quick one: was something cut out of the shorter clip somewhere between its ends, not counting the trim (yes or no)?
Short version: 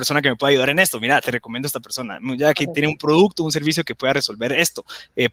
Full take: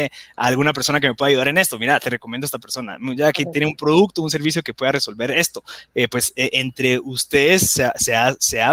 no